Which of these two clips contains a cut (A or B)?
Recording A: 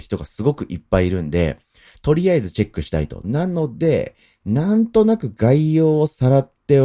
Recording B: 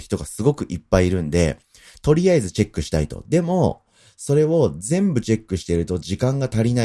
A